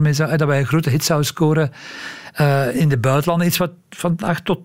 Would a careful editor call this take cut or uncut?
cut